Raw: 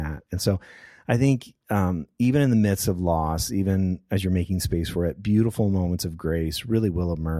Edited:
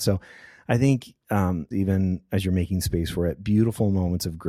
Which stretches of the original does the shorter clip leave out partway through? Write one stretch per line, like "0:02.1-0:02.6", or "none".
0:02.1-0:03.5